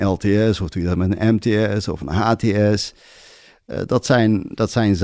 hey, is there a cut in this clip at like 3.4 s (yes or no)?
no